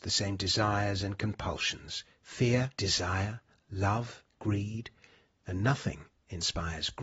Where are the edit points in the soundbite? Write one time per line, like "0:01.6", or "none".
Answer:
0:02.7
0:04.3